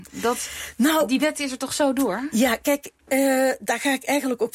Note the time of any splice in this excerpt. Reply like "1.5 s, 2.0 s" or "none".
none